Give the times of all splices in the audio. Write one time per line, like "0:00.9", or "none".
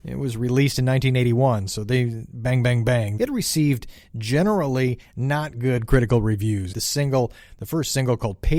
0:03.2
0:06.7

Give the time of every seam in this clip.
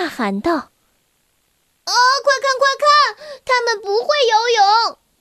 none

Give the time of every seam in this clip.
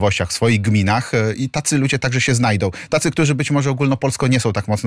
none

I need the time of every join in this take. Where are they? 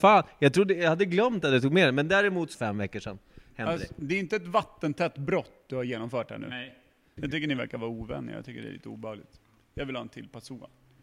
0:02.5
0:07.2

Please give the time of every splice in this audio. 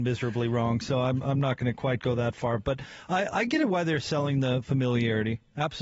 none

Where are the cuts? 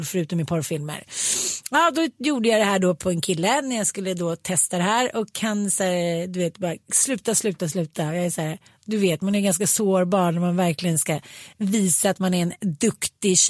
0:07.6

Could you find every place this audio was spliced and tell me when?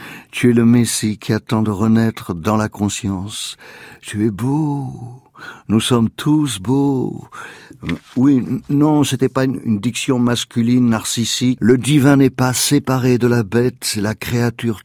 0:11.6

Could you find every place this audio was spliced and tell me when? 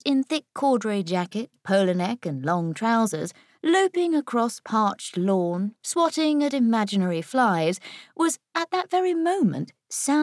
0:05.8

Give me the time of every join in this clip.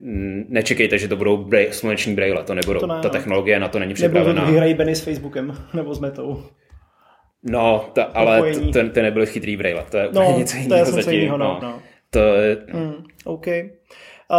0:11.6
0:12.7

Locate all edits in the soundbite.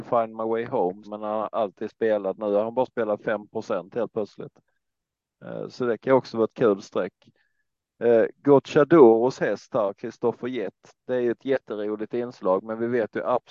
0:01.0

